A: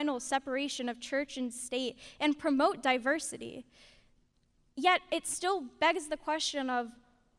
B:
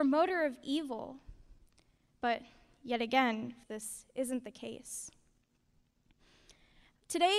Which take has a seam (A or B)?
B